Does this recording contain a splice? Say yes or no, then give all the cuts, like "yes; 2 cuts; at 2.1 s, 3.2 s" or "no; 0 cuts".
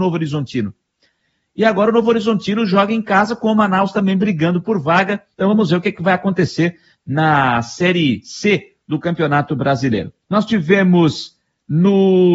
yes; 2 cuts; at 5.3 s, 10.2 s